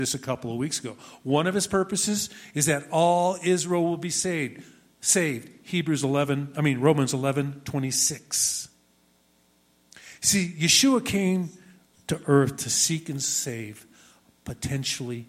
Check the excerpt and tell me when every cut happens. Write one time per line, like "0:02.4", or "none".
none